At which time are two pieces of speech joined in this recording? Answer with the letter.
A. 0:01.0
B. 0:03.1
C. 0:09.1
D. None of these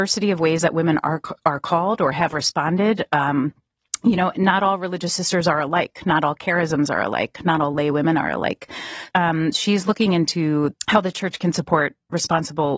C